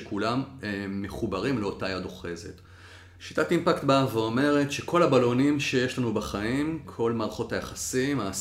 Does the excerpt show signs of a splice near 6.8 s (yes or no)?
yes